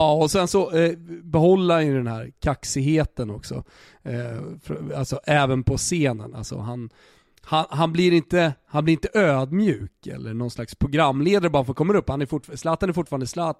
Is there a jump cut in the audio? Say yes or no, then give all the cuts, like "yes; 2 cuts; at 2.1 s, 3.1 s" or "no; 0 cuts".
no; 0 cuts